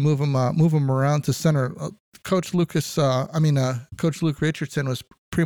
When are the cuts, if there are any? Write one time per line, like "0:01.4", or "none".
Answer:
none